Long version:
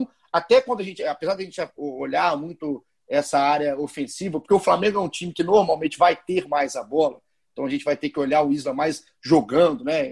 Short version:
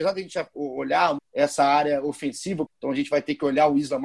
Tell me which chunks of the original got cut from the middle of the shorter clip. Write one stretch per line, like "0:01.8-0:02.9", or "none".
0:02.4-0:02.9
0:04.4-0:07.4